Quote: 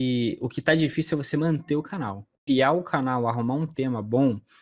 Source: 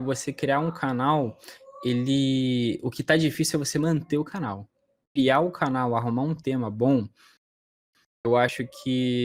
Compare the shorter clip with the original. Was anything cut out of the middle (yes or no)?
yes